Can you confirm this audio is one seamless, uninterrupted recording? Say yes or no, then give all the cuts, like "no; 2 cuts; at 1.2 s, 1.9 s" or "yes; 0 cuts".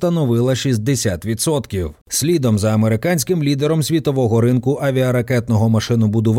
no; 1 cut; at 2.0 s